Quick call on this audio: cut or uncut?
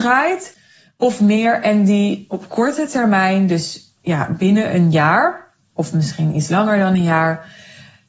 uncut